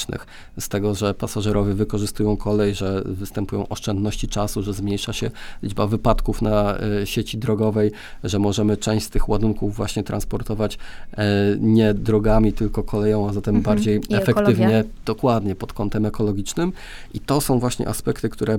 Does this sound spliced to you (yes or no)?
no